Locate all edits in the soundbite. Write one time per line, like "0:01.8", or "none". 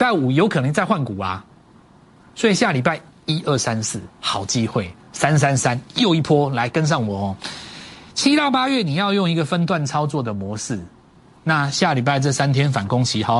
none

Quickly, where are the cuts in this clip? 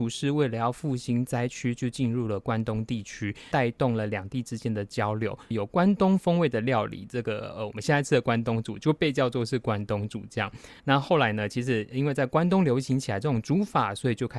0:03.5
0:05.5
0:10.8

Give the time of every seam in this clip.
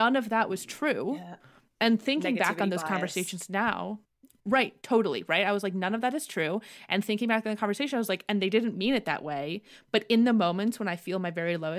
none

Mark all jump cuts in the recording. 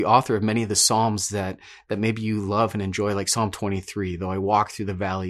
none

